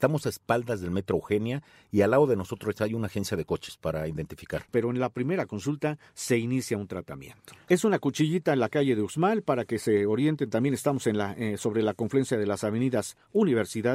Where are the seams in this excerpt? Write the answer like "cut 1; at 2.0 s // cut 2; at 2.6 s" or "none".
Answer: cut 1; at 4.7 s // cut 2; at 7.7 s